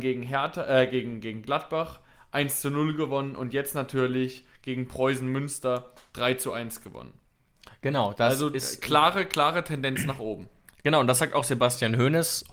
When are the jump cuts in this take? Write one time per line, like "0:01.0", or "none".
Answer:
none